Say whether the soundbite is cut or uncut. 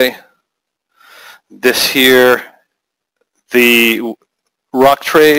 uncut